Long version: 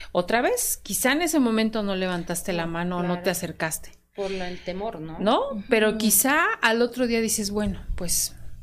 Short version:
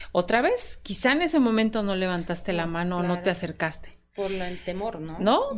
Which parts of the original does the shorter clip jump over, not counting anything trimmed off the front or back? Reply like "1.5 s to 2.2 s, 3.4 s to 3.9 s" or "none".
none